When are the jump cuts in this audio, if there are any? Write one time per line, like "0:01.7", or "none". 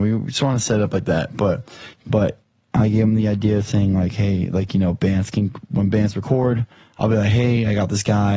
0:01.9